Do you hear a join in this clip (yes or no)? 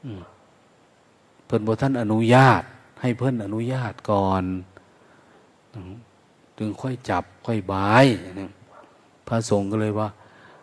no